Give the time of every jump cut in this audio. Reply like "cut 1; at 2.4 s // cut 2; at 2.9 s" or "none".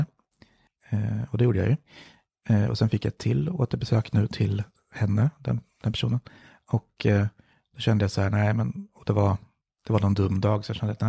none